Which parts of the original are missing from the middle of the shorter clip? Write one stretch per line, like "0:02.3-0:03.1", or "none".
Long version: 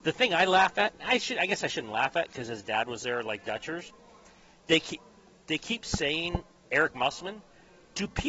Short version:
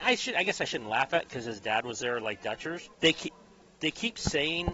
0:04.0-0:04.6

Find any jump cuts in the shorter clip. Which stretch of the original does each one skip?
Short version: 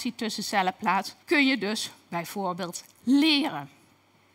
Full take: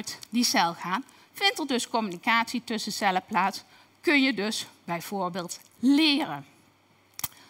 0:03.7-0:04.0

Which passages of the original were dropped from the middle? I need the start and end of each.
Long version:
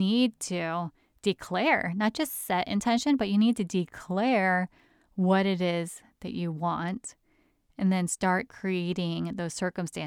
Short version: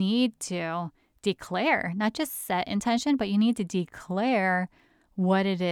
none

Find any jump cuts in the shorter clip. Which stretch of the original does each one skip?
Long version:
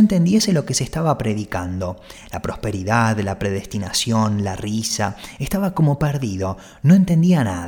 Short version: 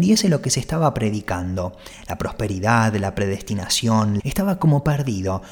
0:04.4-0:05.3

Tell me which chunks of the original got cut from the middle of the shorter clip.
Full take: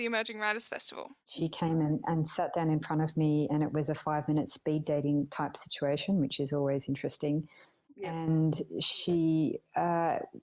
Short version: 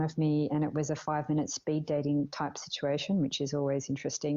none

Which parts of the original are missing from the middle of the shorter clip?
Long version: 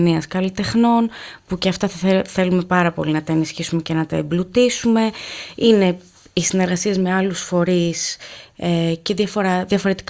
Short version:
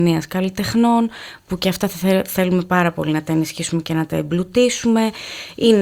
none

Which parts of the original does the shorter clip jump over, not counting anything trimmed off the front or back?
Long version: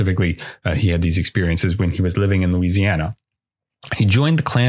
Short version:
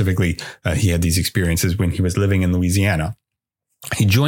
none

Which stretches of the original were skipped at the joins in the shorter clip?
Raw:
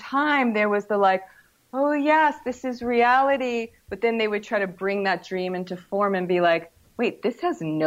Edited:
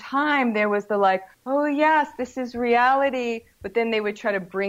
0:01.3-0:01.6

